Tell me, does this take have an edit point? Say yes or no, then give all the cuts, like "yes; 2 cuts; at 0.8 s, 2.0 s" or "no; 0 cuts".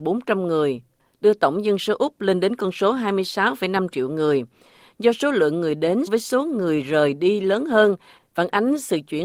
yes; 1 cut; at 6.1 s